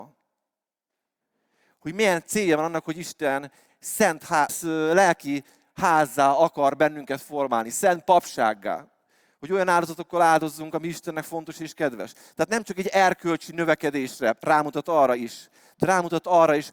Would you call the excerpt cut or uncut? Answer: cut